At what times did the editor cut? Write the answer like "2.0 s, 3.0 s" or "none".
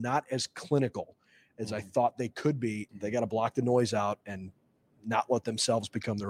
2.9 s, 4.2 s